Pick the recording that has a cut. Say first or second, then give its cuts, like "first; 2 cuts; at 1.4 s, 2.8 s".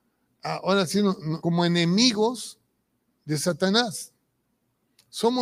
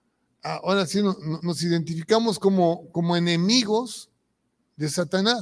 first; 1 cut; at 1.4 s